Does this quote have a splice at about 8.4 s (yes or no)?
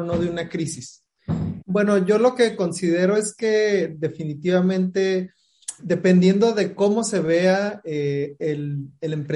no